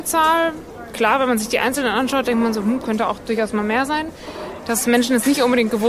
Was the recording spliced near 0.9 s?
no; 1 cut; at 4.6 s

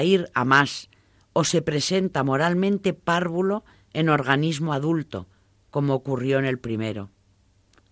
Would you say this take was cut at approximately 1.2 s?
yes; 1 cut; at 1.2 s

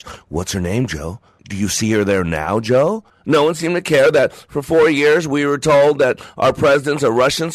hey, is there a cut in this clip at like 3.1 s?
yes; 2 cuts; at 1.4 s, 3.1 s

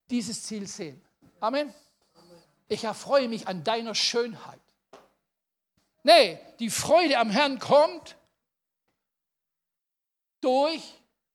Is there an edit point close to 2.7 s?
yes; 2 cuts; at 2.7 s, 5.9 s

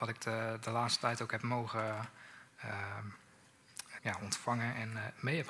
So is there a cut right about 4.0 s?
yes; 1 cut; at 4.0 s

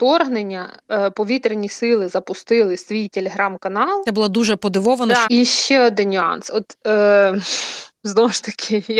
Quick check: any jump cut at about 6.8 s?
no; 2 cuts; at 4.1 s, 5.2 s

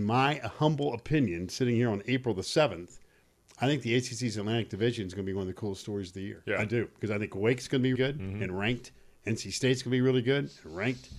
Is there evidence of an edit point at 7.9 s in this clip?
yes; 1 cut; at 7.9 s

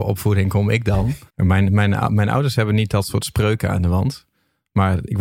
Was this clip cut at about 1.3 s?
yes; 1 cut; at 1.3 s

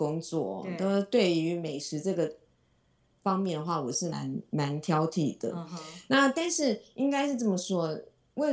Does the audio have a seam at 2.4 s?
no; 1 cut; at 4.1 s

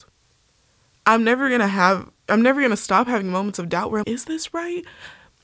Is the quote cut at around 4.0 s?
yes; 1 cut; at 4.0 s

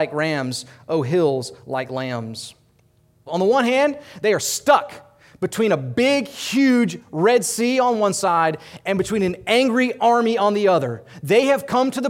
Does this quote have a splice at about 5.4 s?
no; 1 cut; at 3.3 s

